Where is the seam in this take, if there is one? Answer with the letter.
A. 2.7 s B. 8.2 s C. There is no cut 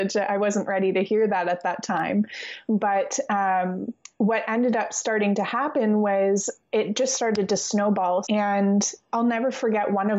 B